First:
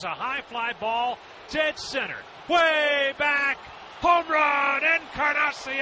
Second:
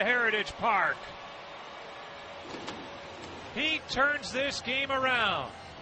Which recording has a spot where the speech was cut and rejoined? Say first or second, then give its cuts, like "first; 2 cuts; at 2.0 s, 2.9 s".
second; 1 cut; at 3.5 s